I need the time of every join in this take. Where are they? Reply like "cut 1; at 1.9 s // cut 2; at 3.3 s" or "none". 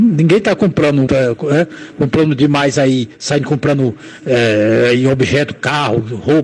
cut 1; at 1.1 s